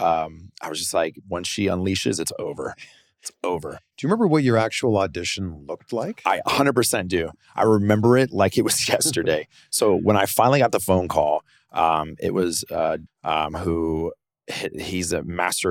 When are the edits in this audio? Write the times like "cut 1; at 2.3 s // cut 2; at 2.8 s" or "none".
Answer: cut 1; at 1.2 s // cut 2; at 13.1 s